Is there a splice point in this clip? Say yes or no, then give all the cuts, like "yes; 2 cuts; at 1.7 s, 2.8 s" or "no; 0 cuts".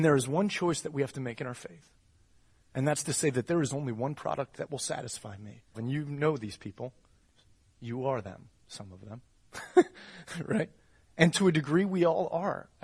yes; 1 cut; at 5.7 s